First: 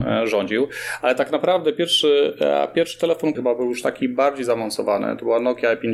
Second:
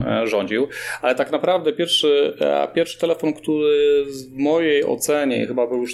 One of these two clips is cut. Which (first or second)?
first